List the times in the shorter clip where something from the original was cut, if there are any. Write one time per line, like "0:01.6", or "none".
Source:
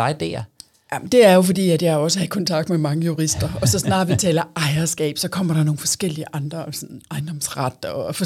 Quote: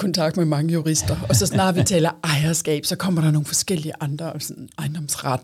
none